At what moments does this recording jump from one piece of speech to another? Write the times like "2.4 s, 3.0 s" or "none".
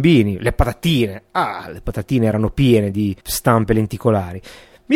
3.2 s